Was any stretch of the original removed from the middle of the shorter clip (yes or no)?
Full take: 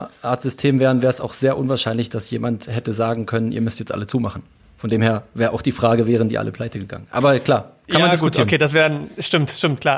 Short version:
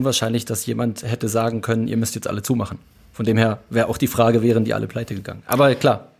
no